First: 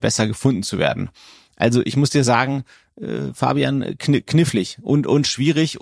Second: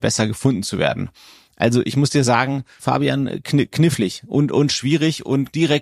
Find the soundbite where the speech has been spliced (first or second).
second